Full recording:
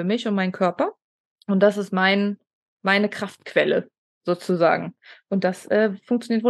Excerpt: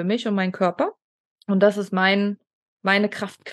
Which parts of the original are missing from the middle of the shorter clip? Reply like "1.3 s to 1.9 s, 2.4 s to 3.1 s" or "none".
none